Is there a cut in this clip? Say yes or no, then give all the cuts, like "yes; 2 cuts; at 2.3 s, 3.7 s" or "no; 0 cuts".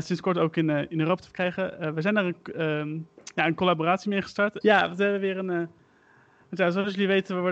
yes; 1 cut; at 4.6 s